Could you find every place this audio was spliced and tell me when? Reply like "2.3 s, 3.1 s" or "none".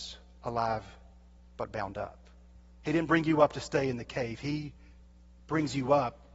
2.8 s